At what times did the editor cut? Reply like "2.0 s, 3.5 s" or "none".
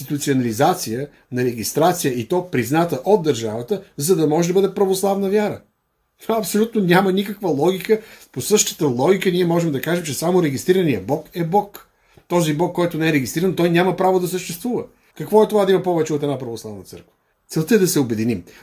15.1 s, 17.3 s